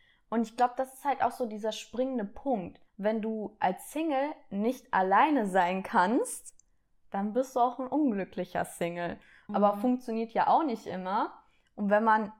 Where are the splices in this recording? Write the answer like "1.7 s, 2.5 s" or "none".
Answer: 2.9 s, 9.5 s